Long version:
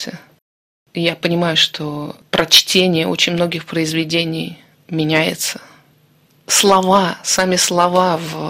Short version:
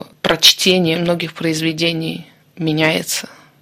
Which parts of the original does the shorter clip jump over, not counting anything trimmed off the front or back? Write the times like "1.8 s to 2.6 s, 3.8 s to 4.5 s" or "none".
3.0 s to 3.3 s